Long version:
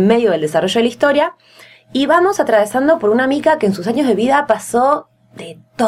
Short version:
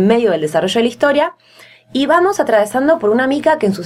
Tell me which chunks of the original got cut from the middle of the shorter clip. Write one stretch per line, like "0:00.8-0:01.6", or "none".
none

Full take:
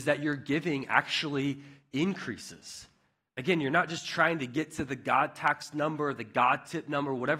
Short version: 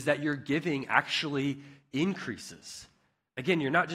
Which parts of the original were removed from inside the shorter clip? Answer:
none

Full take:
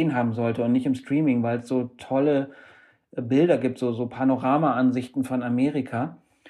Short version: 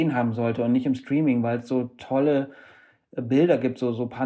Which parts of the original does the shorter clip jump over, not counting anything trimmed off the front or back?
none

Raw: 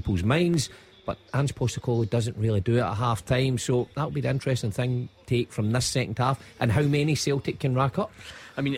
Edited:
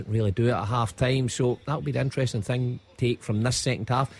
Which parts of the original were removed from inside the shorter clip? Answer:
none

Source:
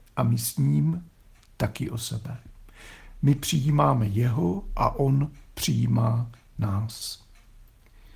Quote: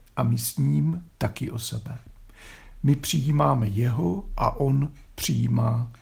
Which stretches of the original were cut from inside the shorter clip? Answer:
0:01.1-0:01.5

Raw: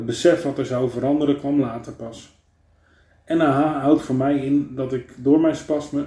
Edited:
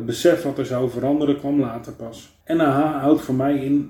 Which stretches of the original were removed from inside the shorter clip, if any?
0:02.4-0:03.2

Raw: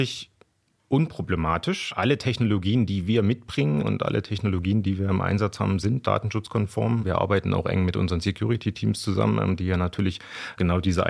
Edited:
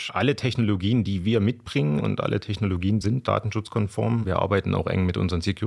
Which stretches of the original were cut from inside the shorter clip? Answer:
0:04.8-0:05.8

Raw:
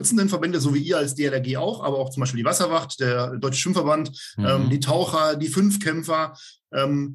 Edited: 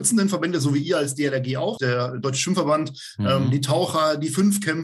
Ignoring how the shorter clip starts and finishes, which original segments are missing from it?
0:01.8-0:03.0

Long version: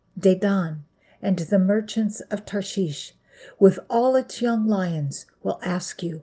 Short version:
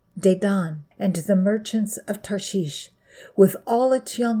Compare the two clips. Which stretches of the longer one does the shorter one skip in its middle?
0:00.9-0:01.1

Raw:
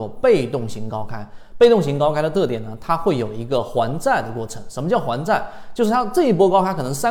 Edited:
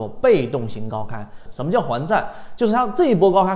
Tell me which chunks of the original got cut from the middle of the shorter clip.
0:01.5-0:04.6

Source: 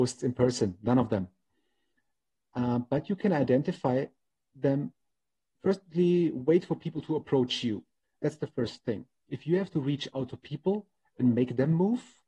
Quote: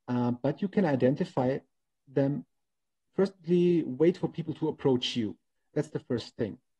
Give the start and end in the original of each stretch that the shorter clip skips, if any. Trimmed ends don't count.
none

